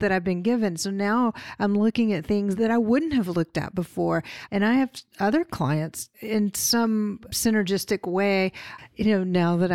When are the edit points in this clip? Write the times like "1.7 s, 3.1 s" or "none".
4.5 s, 8.8 s